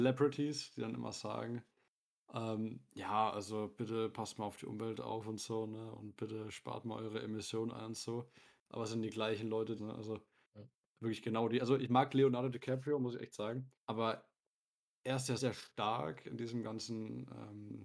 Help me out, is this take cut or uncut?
cut